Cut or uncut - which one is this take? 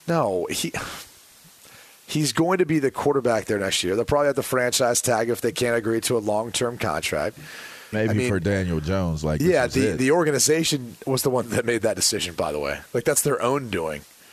cut